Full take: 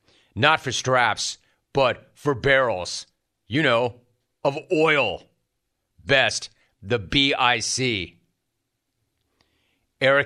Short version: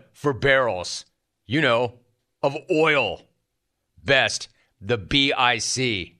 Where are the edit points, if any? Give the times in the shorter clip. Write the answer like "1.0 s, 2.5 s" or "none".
none